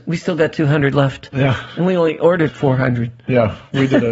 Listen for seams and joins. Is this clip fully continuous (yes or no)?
no